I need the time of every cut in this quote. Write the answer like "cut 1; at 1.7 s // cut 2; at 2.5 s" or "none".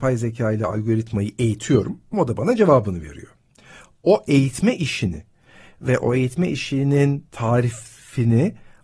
cut 1; at 2.1 s